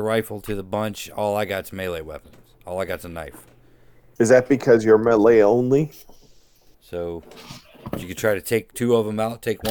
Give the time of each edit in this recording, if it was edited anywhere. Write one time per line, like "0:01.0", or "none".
0:04.2
0:06.7